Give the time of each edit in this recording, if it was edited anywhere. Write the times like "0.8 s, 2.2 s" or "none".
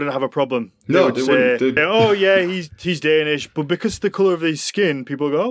1.8 s

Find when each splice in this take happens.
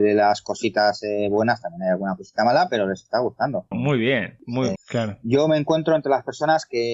3.7 s, 4.8 s

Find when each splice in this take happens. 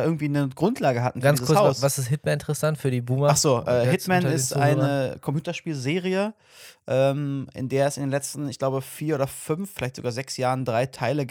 none

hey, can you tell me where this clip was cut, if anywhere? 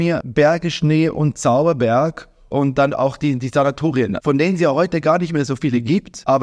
none

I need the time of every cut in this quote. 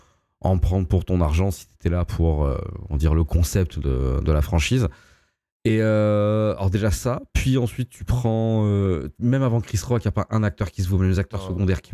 none

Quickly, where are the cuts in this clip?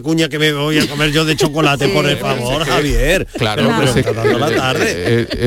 4.0 s

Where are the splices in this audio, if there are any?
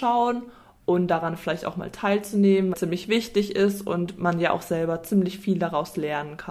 2.7 s

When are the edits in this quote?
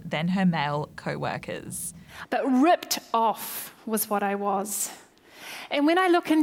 2.2 s

